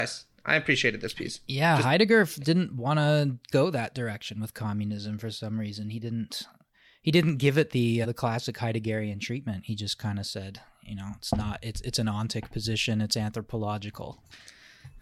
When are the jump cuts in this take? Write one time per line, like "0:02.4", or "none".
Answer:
0:08.0